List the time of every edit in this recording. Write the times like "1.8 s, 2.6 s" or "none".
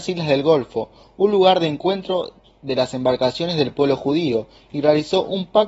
none

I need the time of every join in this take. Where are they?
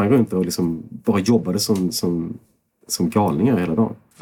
none

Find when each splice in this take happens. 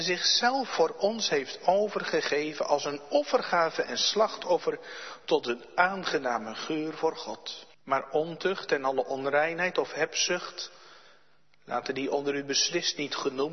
7.7 s

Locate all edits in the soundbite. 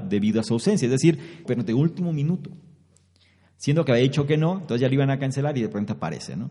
1.4 s

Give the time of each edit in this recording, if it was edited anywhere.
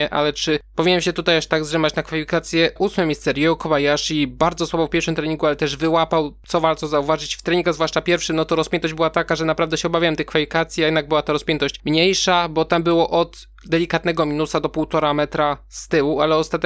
2.8 s

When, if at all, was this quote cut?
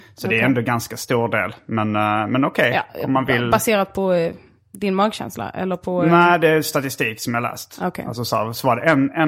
none

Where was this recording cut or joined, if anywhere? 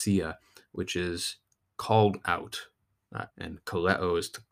3.3 s

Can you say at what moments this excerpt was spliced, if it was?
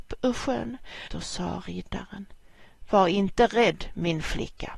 1.1 s

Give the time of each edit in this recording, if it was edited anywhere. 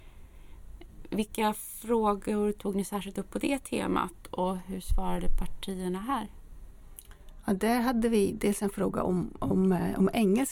none

